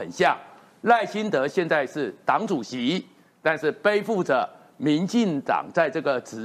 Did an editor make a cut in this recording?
no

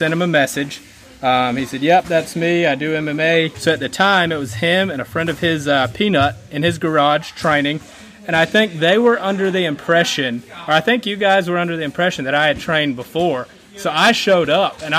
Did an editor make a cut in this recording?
yes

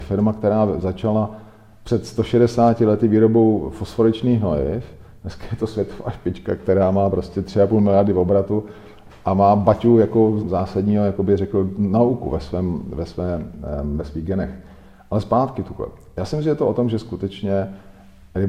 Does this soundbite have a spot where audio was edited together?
yes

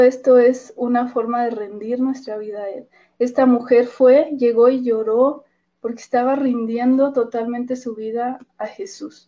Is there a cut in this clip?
no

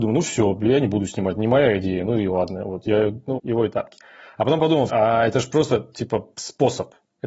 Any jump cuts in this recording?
yes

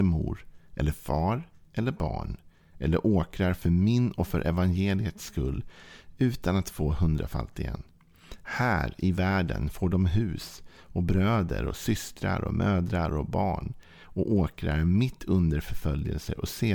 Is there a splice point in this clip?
no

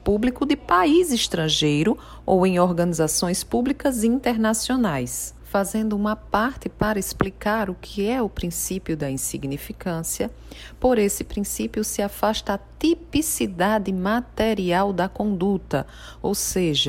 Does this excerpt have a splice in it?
yes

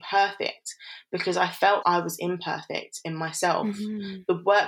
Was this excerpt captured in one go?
no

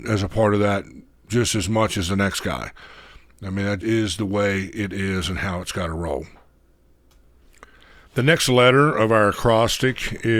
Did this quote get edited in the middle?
yes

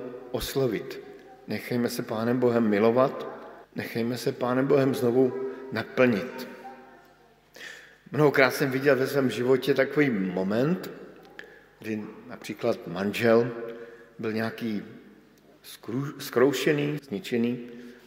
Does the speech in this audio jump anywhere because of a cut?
yes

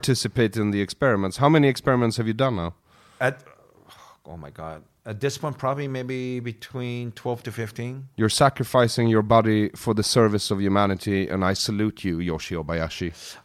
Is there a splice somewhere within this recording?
no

